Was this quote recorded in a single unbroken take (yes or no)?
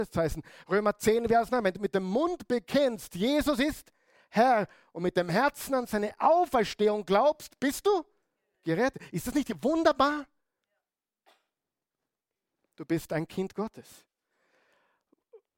yes